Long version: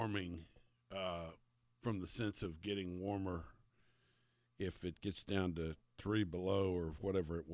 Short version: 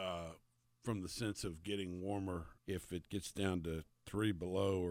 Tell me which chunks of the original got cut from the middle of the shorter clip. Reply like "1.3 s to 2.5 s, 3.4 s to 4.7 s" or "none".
3.6 s to 4.5 s